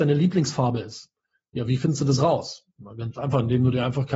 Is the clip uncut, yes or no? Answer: yes